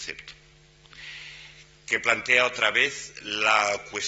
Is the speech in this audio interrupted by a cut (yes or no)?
no